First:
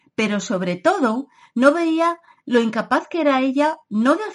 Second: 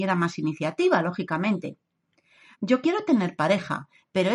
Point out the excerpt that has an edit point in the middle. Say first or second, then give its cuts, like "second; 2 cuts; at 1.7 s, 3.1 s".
second; 1 cut; at 2.5 s